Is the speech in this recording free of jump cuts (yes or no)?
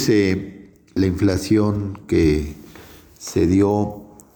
no